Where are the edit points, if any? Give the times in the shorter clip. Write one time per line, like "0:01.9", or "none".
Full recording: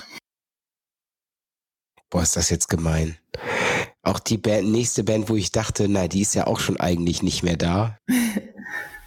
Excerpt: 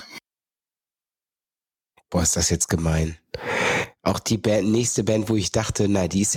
none

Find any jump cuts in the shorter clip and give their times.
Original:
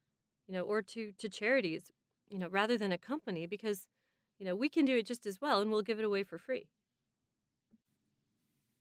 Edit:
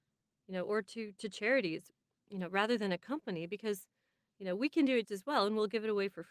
0:05.0

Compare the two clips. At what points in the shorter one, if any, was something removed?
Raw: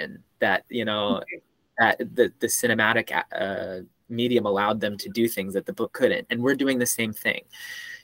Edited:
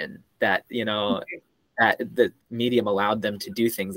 0:02.4

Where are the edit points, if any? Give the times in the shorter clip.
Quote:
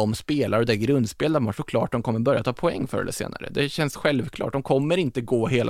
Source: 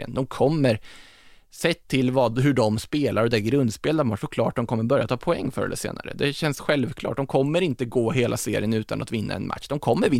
none

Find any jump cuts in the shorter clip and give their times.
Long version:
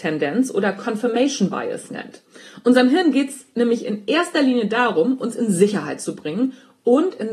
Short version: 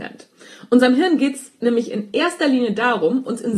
none

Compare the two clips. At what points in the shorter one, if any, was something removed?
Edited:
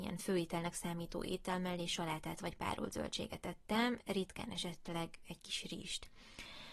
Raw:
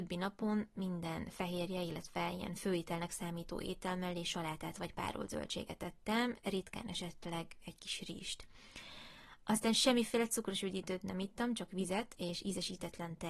none

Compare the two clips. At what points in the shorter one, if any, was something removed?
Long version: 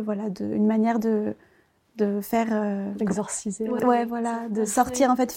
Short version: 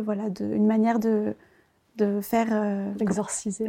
none

